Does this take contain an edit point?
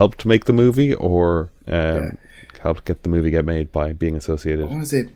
yes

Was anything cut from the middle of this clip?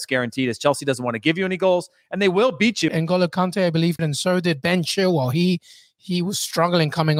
yes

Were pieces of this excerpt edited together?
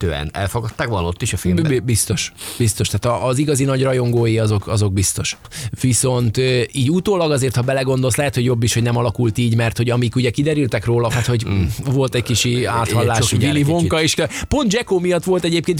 yes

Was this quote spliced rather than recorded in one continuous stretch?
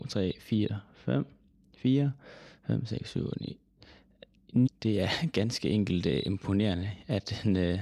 yes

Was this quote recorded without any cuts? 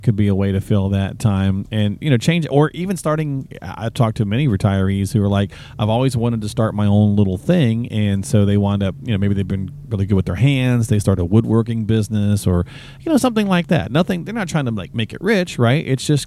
yes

